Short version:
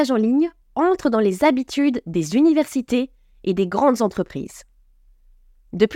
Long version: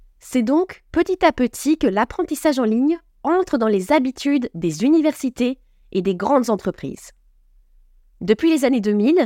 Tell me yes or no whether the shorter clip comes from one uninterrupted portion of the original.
yes